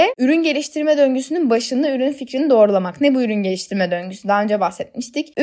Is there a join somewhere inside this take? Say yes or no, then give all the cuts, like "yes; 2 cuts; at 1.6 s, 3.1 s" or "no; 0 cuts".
no; 0 cuts